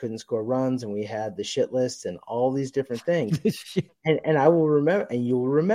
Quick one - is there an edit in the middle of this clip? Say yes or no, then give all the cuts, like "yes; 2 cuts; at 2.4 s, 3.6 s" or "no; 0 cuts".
yes; 1 cut; at 3.9 s